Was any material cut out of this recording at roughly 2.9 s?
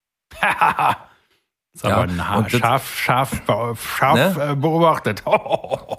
no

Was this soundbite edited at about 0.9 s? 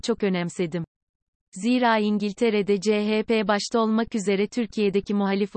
no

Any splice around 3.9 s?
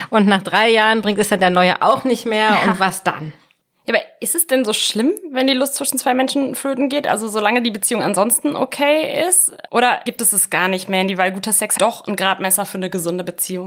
no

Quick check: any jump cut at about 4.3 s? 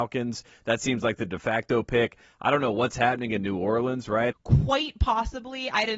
yes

